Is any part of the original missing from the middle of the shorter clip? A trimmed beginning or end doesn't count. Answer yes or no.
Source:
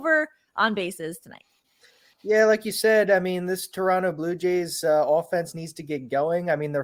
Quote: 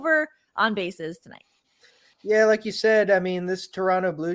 no